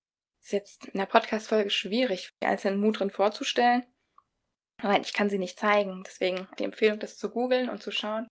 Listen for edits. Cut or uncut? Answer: cut